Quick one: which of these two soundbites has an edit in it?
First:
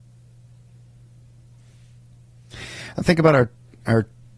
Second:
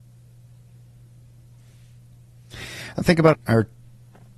second; 1 cut; at 3.3 s

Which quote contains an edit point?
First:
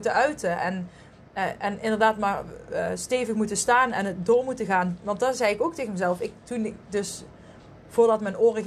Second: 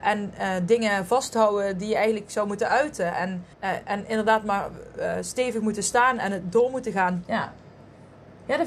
second; 2 cuts; at 3.5 s, 7.2 s

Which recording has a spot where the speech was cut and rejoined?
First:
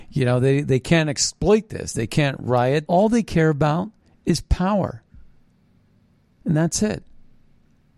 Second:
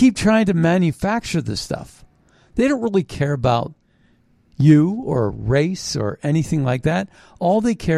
first; 1 cut; at 2.9 s

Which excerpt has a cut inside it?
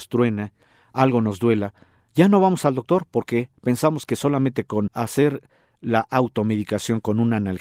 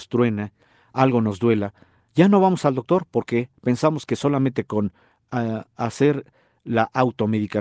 first; 1 cut; at 4.9 s

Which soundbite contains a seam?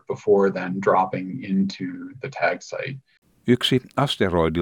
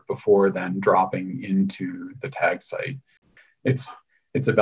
second; 1 cut; at 3.4 s

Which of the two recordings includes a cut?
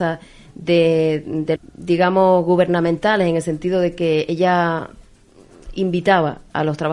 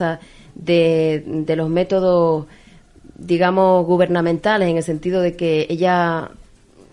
first; 1 cut; at 1.6 s

